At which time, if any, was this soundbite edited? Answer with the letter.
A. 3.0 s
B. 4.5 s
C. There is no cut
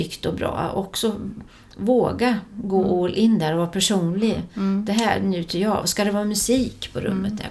C